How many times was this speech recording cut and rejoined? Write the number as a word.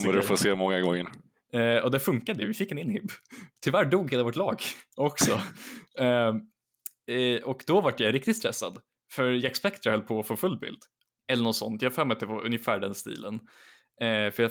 one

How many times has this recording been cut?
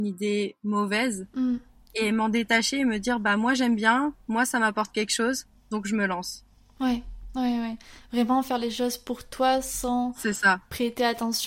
zero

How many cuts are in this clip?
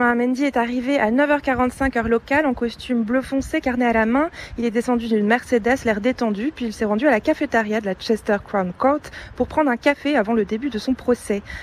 one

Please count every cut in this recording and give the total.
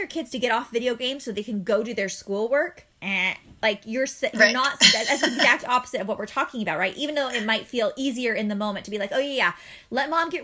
one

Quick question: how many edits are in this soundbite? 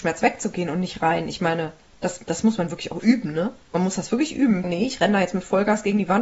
two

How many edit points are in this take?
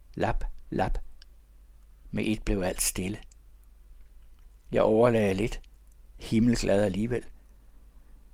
zero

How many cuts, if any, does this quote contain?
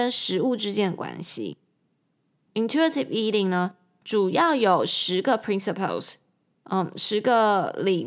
zero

